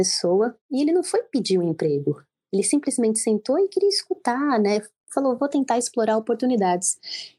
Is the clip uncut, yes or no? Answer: yes